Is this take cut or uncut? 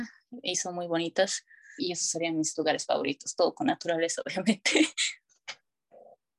cut